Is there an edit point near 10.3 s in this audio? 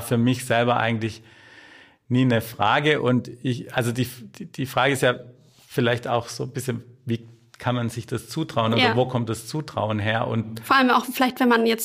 no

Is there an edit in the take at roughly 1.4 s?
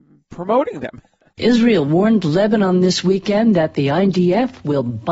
yes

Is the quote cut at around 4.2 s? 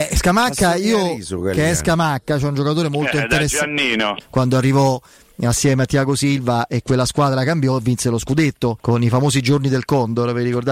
yes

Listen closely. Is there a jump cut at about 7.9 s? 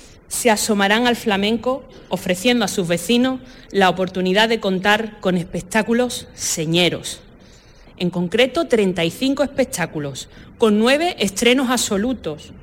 no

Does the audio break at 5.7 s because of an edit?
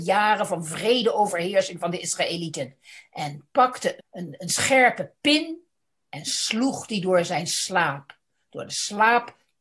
no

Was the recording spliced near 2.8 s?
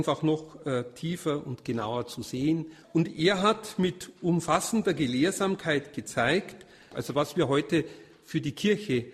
yes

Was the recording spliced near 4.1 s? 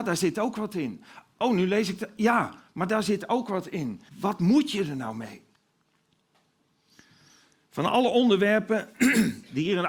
yes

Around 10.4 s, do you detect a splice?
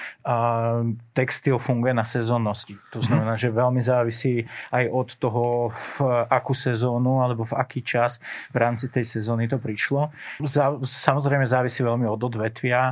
yes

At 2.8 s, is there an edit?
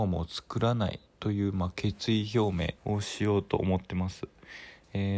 yes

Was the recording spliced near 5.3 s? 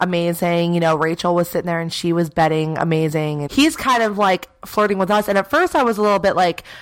no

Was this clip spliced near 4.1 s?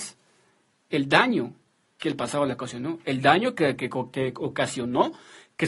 no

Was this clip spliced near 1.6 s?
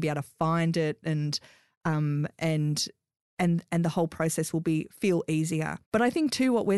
no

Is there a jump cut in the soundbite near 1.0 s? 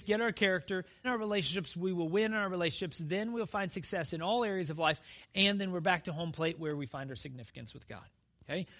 yes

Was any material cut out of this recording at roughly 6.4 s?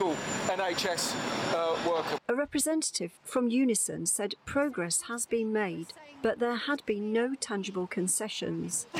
no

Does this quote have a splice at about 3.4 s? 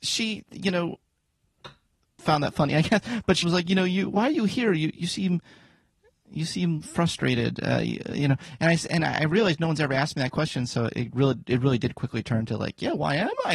yes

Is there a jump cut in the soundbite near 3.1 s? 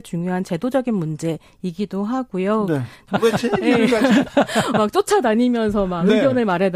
yes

